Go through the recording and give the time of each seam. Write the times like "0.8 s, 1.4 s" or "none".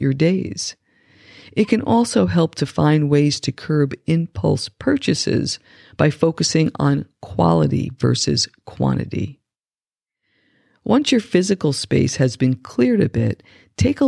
none